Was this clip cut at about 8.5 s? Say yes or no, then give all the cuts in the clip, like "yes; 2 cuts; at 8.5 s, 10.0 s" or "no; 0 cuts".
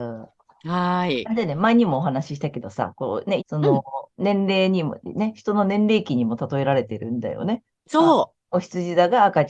no; 1 cut; at 3.4 s